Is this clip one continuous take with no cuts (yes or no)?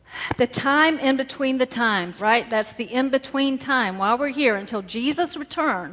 no